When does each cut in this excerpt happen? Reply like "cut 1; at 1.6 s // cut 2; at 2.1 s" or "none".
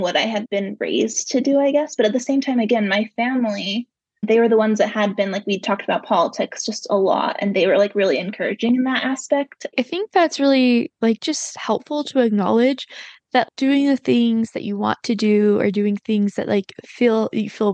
cut 1; at 9.7 s